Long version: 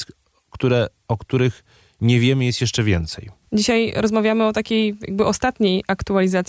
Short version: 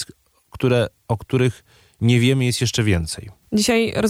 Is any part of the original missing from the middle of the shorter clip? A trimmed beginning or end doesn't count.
no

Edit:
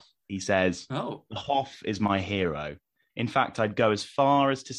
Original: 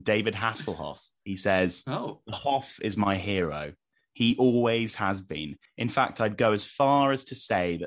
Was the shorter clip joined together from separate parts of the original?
yes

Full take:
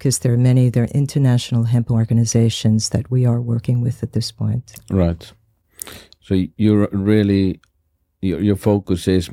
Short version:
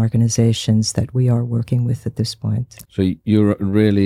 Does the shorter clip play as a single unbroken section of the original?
no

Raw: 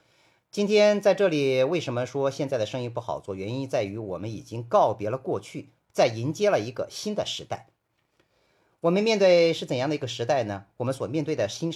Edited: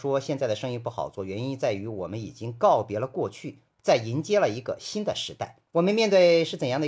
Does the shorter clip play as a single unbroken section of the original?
no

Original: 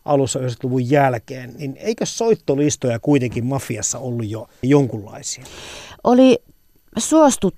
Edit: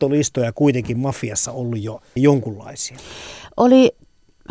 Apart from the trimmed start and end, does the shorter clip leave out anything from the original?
no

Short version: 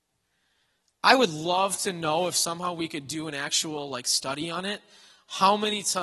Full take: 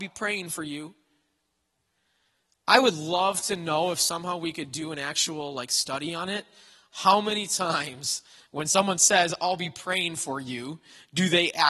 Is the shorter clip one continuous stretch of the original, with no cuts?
yes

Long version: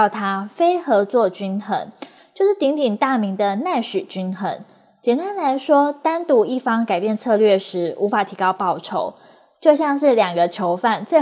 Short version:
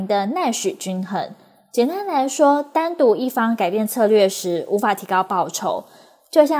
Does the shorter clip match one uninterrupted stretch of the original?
yes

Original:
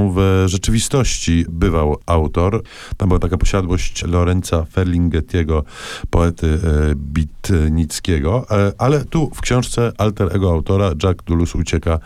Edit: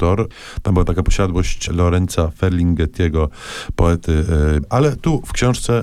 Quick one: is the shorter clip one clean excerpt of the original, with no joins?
no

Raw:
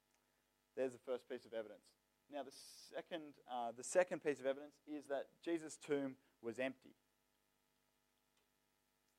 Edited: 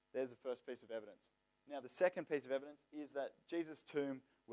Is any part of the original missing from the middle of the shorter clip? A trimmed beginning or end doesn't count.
yes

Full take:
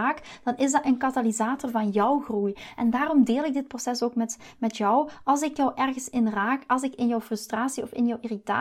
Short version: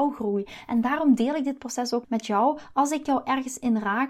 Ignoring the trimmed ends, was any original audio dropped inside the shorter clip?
yes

